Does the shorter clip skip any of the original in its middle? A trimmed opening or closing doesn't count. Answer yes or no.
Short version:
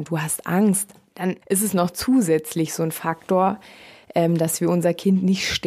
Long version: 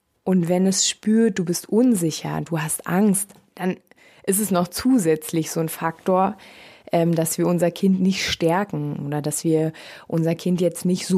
yes